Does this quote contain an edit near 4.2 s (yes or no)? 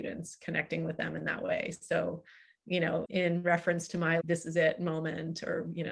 yes